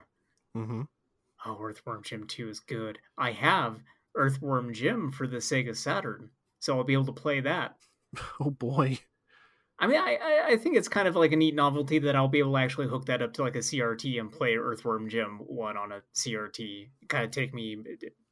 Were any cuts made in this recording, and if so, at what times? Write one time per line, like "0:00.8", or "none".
none